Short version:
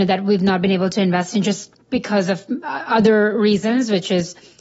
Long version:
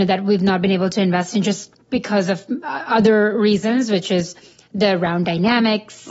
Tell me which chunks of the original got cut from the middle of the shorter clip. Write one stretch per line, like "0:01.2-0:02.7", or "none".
none